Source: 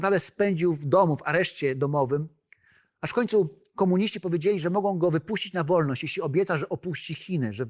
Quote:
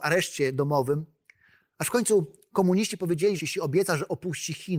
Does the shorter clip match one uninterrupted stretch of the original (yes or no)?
no